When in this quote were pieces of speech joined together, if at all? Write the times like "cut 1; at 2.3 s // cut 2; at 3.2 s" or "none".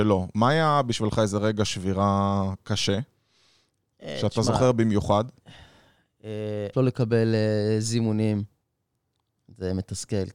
cut 1; at 6.7 s